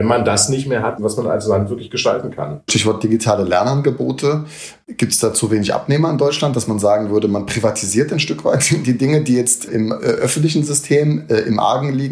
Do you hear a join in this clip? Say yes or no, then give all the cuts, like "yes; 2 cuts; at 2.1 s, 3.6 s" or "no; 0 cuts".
yes; 2 cuts; at 1.0 s, 9.7 s